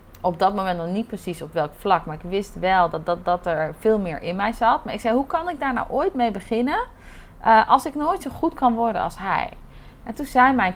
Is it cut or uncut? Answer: uncut